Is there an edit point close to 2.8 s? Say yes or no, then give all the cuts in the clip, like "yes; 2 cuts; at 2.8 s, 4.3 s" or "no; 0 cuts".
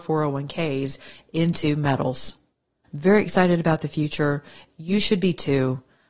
yes; 1 cut; at 2.8 s